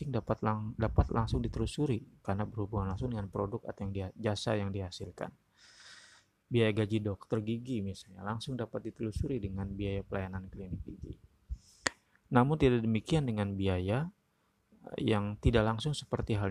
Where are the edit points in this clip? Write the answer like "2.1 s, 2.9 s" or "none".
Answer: none